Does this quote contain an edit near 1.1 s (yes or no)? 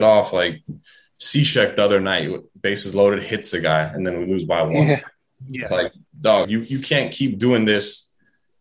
no